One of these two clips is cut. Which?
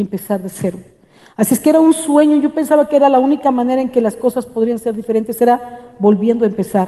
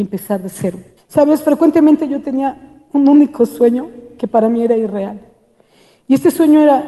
second; 1 cut; at 1.0 s

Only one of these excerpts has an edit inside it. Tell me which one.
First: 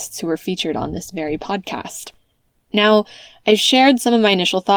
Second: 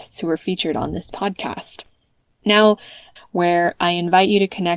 second; 2 cuts; at 1.1 s, 3.2 s

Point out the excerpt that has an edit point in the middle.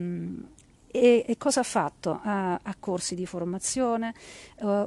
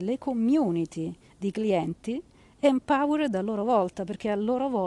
first; 1 cut; at 2.8 s

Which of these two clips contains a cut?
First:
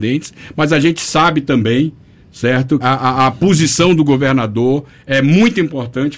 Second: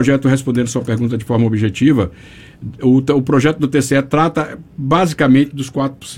first; 1 cut; at 2.8 s

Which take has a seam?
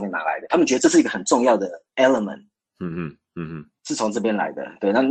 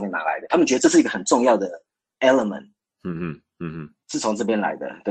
first; 1 cut; at 1.9 s

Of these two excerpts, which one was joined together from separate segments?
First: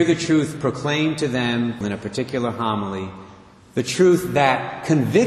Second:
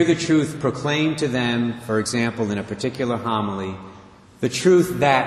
first; 1 cut; at 1.8 s

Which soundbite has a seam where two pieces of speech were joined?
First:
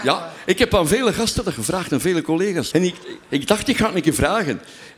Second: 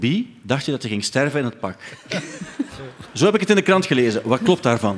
first; 1 cut; at 2.7 s

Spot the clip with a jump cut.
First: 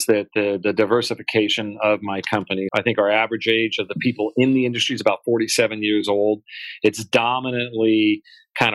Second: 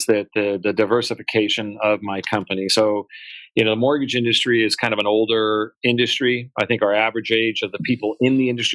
first; 1 cut; at 2.7 s

